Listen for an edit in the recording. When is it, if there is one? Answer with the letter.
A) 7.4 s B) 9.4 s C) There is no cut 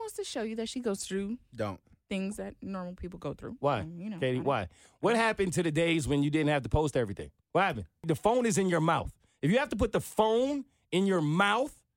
A